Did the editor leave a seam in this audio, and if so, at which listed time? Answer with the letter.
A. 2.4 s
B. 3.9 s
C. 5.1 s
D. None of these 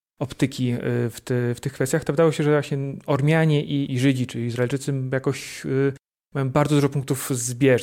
B